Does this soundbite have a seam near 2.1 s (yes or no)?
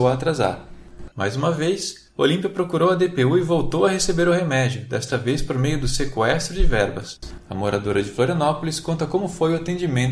no